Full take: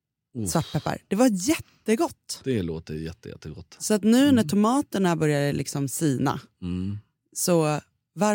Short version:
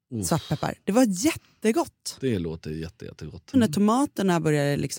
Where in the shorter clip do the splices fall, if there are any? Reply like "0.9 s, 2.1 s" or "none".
3.5 s